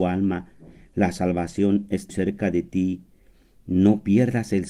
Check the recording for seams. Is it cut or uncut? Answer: cut